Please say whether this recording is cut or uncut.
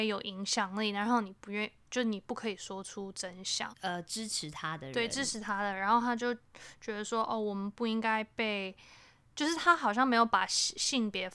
cut